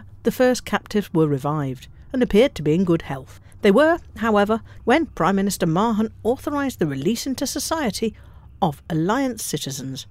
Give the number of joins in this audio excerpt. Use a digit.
1